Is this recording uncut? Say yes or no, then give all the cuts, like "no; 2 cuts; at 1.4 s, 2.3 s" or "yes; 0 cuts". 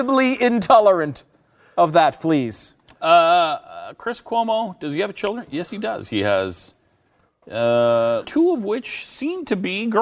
no; 1 cut; at 8.2 s